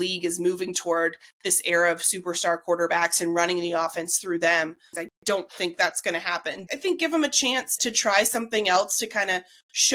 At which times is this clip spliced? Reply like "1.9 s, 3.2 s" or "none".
4.9 s, 6.7 s, 7.8 s